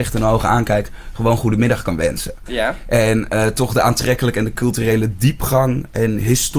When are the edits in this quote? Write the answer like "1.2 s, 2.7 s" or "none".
none